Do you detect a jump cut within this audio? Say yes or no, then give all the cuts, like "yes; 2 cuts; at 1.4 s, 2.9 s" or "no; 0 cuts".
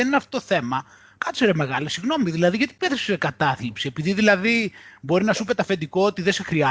no; 0 cuts